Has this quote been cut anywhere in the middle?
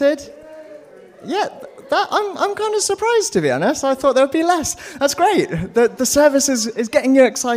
no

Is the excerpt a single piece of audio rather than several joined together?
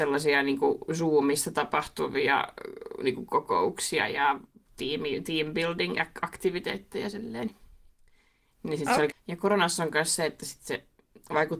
no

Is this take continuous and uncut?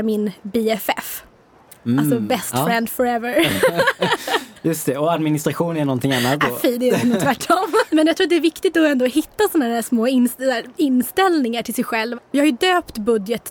no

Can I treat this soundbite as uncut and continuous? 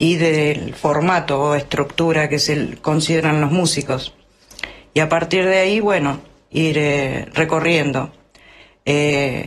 yes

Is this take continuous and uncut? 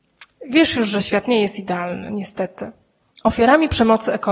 yes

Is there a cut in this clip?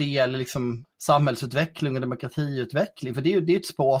yes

